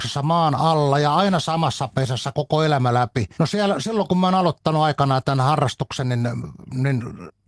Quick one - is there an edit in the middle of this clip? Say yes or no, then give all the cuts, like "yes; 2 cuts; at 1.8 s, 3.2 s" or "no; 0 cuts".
yes; 1 cut; at 3.3 s